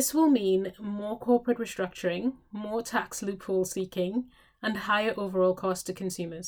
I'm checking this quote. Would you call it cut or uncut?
uncut